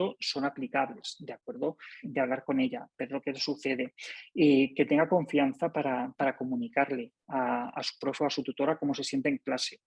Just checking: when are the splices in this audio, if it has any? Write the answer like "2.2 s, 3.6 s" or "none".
2.0 s